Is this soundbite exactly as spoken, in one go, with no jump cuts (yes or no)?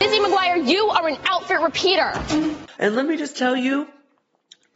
no